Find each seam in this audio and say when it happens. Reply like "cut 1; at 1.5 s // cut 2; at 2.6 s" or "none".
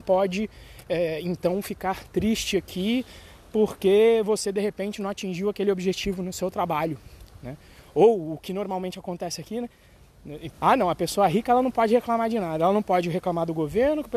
cut 1; at 10.5 s